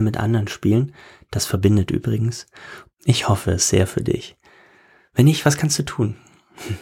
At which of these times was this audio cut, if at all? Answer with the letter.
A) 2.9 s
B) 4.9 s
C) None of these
A